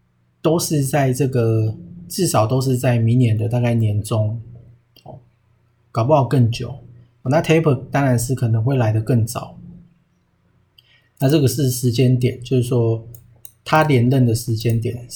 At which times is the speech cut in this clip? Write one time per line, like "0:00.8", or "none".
0:07.2